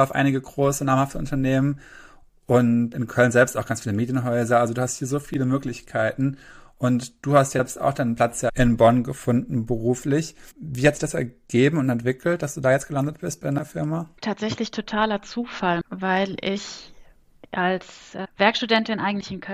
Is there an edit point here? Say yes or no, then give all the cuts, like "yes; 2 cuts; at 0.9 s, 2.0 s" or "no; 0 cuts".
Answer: yes; 2 cuts; at 2.9 s, 15.8 s